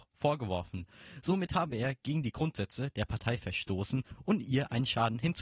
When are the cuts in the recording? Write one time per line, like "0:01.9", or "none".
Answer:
none